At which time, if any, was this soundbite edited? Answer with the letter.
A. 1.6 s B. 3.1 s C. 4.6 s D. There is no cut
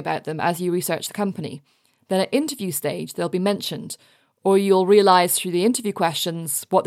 D